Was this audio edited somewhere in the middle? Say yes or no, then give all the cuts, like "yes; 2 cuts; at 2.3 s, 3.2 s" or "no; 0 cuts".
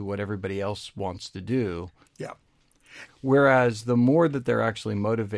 yes; 2 cuts; at 2.0 s, 3.1 s